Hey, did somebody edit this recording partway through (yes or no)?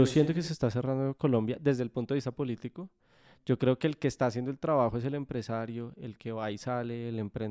no